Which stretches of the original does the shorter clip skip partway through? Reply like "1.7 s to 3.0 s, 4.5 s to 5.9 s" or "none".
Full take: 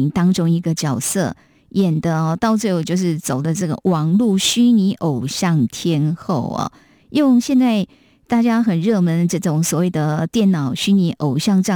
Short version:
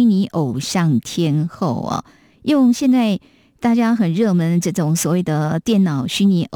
none